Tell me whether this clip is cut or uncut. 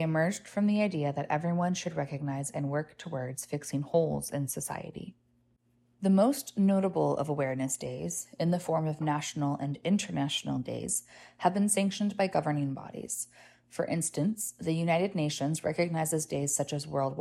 uncut